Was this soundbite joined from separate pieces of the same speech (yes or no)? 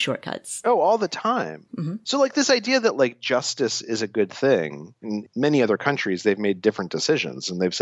yes